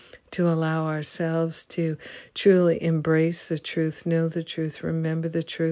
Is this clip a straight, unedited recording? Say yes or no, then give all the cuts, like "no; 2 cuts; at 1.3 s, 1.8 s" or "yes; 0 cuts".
yes; 0 cuts